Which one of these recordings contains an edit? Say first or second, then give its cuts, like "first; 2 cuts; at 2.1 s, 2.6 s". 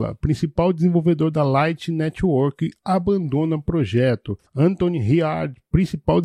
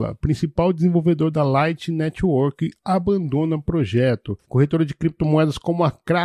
second; 1 cut; at 4.4 s